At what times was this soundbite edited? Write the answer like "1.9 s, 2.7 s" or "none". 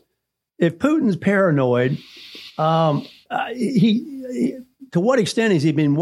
3.3 s